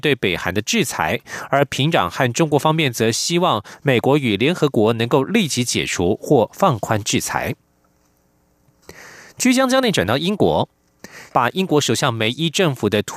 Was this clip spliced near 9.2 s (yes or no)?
no